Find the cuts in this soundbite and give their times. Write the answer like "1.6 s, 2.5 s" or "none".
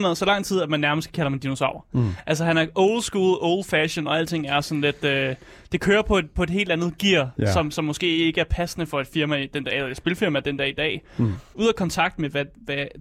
11.5 s